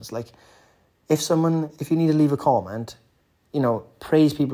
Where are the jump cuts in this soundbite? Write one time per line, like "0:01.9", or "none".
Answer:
none